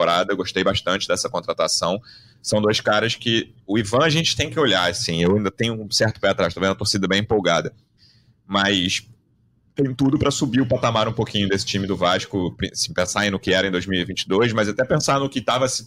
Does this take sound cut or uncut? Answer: uncut